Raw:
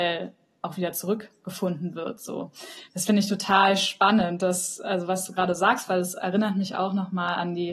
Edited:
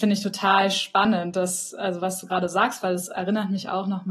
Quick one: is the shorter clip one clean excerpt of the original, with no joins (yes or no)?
yes